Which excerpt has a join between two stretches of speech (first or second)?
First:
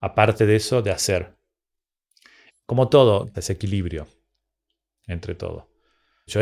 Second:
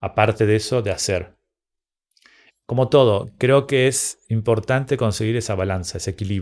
first